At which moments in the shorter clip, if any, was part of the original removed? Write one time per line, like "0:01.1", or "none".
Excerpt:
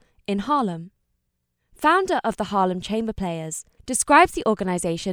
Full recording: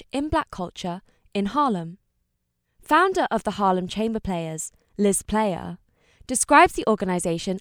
0:03.8